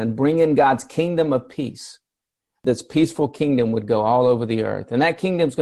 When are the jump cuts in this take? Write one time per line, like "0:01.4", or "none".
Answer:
none